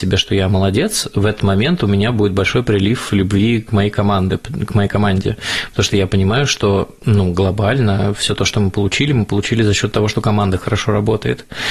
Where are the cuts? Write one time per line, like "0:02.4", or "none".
none